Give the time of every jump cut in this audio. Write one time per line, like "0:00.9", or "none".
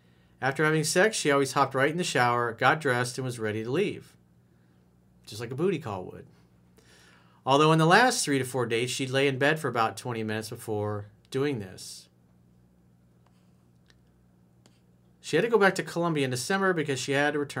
none